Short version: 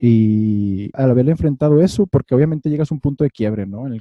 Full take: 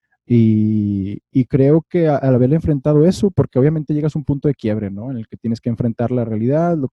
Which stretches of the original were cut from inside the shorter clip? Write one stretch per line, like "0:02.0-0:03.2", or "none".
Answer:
0:01.2-0:02.2